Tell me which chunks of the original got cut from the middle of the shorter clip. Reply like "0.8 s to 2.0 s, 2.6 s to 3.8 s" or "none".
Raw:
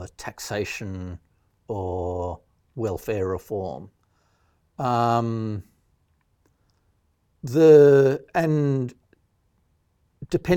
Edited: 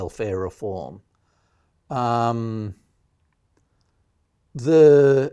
none